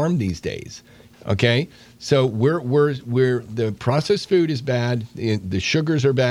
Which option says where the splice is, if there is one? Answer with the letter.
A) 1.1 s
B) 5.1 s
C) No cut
A